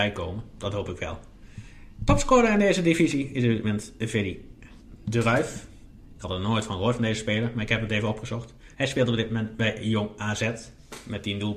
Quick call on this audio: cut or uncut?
cut